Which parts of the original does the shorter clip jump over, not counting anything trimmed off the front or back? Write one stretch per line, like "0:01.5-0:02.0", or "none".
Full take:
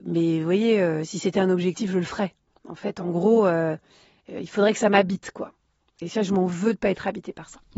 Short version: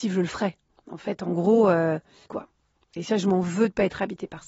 0:04.0-0:05.3